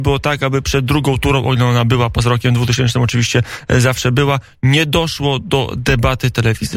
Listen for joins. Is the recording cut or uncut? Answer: uncut